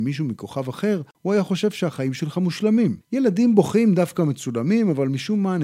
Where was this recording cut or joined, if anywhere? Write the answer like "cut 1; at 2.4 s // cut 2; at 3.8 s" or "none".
cut 1; at 3.0 s